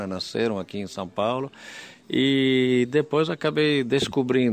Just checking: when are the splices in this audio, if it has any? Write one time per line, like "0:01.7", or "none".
0:02.0